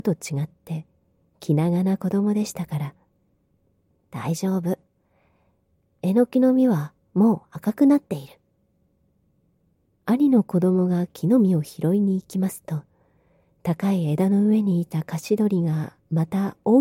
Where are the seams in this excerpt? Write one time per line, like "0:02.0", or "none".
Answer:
0:09.9